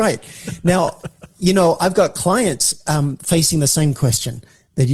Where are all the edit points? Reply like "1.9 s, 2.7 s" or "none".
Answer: none